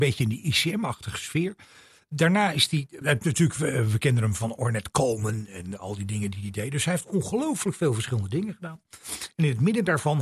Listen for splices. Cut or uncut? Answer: cut